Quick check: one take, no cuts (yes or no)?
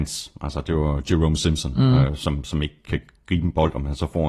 no